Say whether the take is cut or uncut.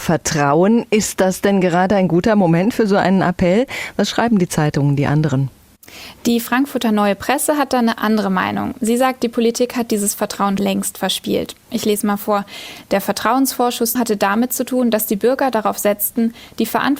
cut